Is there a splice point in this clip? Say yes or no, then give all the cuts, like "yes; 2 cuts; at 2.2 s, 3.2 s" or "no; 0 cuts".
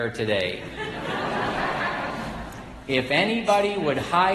no; 0 cuts